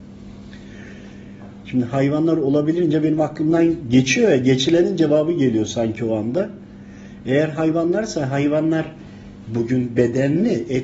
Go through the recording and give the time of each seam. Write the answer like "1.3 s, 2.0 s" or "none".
1.6 s